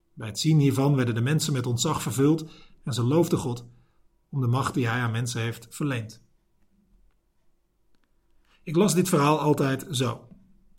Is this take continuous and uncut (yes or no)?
yes